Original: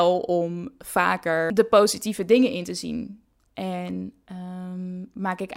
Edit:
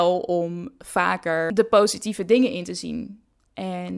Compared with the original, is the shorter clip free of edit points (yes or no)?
yes